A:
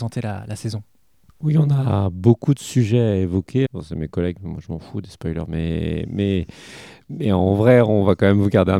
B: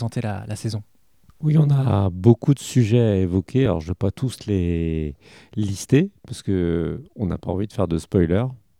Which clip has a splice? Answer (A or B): A